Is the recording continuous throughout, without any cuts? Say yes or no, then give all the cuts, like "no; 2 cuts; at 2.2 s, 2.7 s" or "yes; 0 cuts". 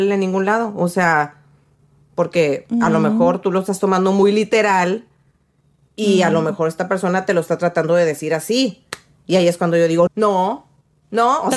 no; 1 cut; at 10.1 s